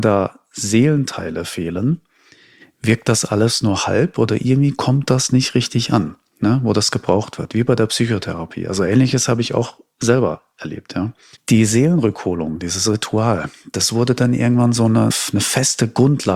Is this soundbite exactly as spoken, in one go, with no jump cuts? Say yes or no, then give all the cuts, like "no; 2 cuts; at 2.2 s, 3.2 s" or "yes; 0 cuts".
no; 2 cuts; at 11.4 s, 15.1 s